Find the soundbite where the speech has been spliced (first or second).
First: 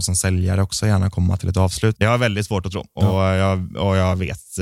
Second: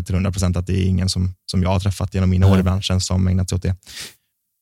first